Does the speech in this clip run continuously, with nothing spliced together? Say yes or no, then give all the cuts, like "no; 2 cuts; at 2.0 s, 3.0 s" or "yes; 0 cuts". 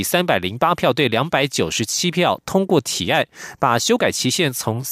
yes; 0 cuts